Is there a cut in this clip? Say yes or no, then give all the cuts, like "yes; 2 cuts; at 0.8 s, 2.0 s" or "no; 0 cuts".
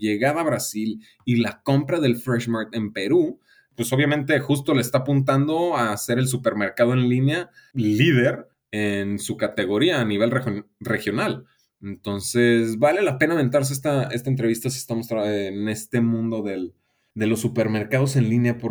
no; 0 cuts